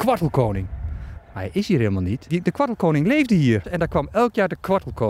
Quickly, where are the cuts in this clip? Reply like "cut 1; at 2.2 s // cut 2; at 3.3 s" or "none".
cut 1; at 1.1 s // cut 2; at 2.3 s // cut 3; at 3.6 s